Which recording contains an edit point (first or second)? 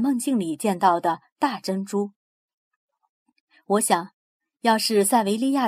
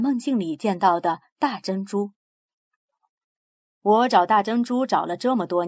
second